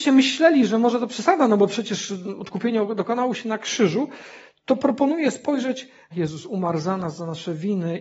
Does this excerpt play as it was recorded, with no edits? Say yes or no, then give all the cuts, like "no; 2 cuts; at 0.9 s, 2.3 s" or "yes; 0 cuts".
no; 1 cut; at 6.1 s